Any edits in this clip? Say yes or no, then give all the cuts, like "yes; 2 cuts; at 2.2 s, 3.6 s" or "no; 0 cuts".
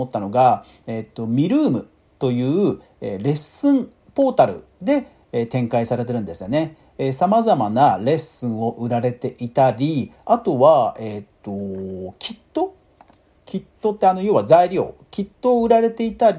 no; 0 cuts